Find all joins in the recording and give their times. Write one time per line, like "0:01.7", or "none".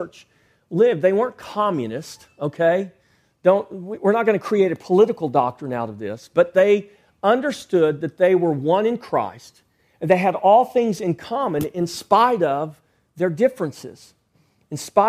none